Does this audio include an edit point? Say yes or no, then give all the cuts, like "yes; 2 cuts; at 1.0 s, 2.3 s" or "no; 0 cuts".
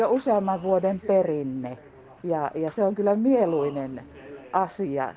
no; 0 cuts